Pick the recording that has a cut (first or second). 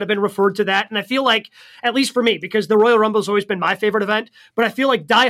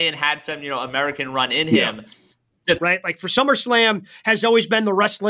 second